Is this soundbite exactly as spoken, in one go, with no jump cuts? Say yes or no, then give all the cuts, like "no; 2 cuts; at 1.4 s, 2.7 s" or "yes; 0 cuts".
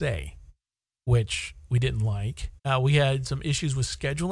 no; 1 cut; at 2.6 s